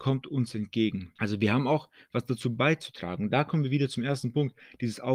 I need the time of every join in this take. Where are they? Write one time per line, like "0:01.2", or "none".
0:01.2